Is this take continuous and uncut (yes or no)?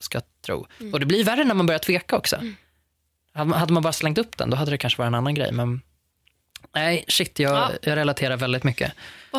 yes